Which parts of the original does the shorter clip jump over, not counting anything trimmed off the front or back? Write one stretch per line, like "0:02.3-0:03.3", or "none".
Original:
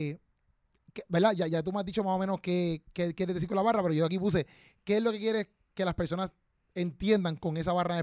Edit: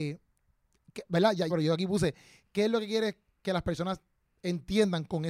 0:01.5-0:03.8

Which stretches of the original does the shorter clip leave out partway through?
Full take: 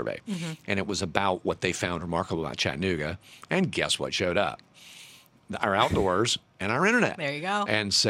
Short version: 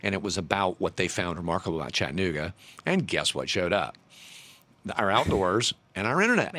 none

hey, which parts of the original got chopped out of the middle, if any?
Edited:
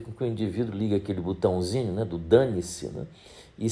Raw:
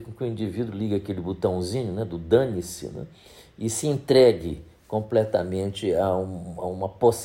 none

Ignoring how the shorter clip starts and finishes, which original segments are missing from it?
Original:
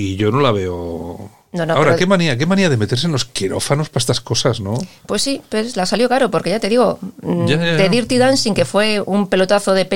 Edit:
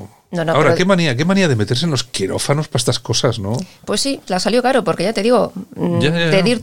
0:05.5-0:05.7

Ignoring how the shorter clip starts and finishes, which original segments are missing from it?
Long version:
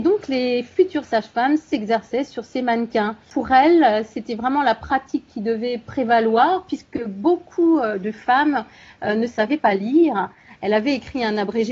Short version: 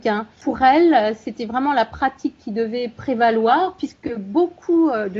none

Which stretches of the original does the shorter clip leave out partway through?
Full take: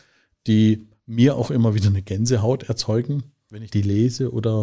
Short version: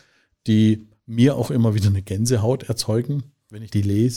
none

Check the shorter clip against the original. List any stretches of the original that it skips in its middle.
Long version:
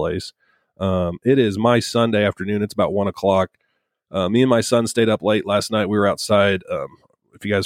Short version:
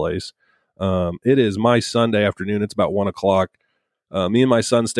none

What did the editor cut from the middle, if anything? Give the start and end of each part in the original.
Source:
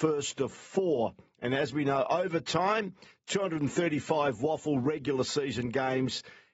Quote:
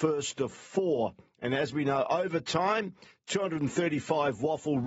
none

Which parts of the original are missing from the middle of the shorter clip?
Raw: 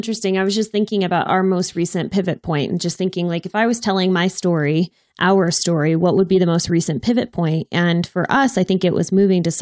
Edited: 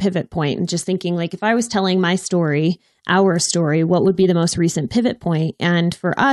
none

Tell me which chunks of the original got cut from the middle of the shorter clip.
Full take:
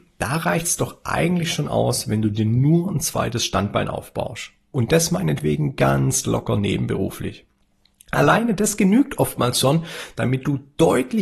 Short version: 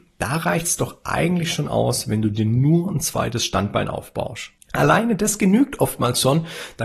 0:04.6-0:08.0

